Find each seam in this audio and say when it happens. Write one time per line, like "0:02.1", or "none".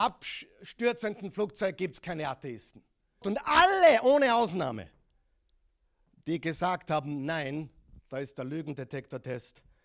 0:03.2